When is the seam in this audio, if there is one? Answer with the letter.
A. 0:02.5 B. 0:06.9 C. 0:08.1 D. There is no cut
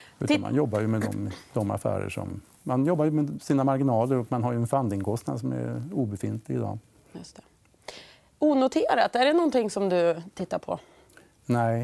D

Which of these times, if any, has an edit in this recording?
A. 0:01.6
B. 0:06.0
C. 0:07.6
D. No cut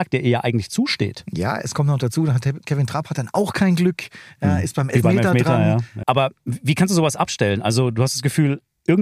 B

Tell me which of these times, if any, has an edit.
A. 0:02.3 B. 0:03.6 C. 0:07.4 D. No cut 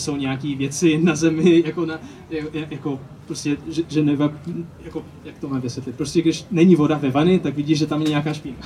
D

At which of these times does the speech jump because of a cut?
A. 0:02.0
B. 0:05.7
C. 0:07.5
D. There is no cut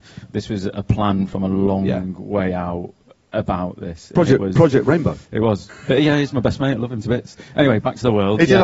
B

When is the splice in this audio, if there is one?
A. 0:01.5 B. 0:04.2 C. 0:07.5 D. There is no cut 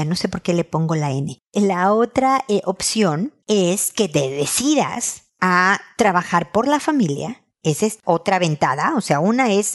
D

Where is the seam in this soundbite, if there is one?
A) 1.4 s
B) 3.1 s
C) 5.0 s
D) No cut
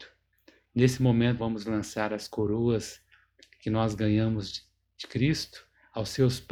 A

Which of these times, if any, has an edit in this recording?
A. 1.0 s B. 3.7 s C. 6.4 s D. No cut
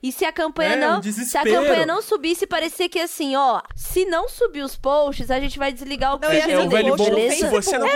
B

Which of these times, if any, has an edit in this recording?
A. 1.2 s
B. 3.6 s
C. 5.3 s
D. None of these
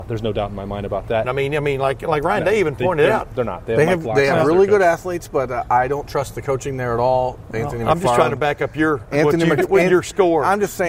A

